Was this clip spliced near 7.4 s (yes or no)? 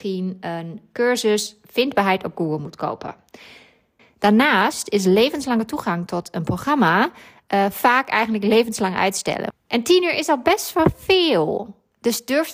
no